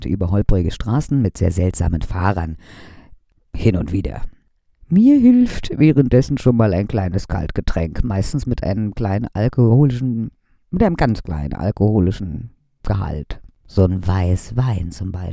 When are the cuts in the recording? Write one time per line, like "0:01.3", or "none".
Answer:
none